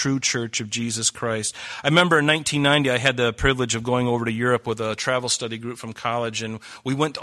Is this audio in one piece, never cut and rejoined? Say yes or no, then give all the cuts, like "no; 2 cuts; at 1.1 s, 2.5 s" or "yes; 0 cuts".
yes; 0 cuts